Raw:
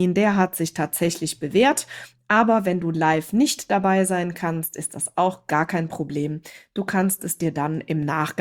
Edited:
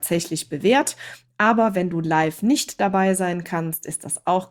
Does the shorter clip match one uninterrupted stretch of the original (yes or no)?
yes